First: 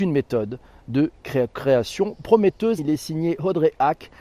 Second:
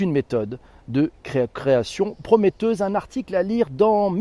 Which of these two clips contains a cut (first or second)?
first